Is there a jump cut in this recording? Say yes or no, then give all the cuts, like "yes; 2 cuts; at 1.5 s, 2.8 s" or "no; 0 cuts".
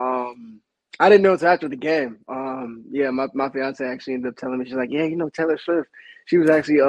no; 0 cuts